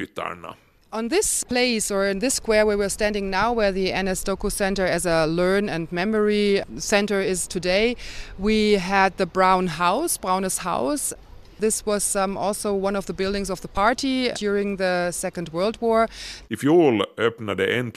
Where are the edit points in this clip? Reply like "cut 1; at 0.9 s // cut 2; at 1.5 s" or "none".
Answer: cut 1; at 14.3 s // cut 2; at 16.4 s